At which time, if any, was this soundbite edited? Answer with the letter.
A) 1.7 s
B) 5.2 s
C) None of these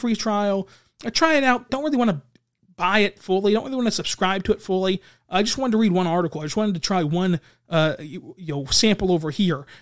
A